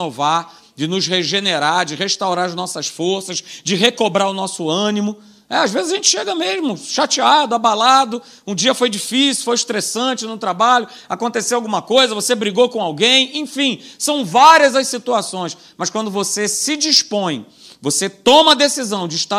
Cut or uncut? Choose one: uncut